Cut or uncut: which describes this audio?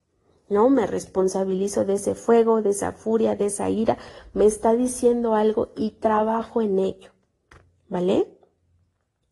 uncut